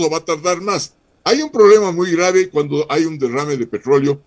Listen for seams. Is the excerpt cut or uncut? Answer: uncut